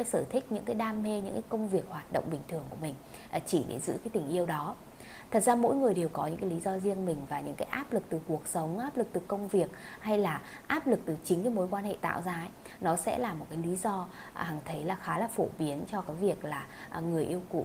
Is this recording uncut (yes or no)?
yes